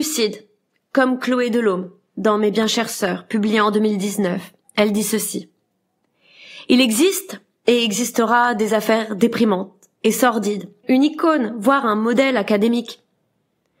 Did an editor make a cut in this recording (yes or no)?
yes